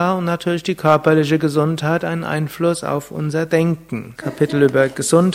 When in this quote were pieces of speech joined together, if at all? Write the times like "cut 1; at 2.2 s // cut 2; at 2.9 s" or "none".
cut 1; at 4.1 s